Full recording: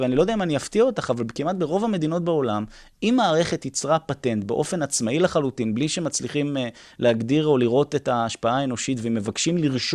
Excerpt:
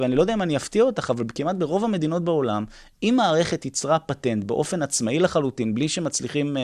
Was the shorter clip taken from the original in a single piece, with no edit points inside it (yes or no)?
yes